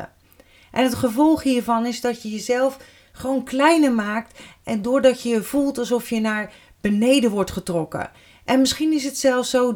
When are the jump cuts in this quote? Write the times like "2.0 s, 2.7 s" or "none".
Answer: none